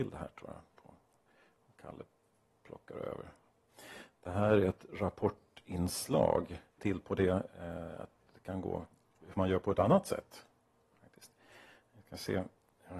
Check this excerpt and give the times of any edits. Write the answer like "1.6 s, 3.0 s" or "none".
6.8 s